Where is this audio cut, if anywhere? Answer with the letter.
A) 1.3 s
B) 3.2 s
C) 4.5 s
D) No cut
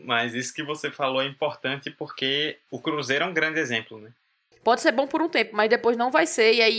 C